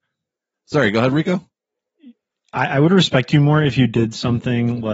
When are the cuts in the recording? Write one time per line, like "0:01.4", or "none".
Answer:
none